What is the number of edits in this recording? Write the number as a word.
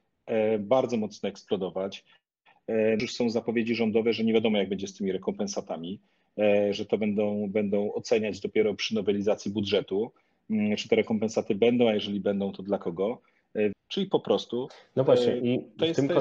two